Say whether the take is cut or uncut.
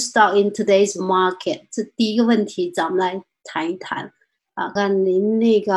cut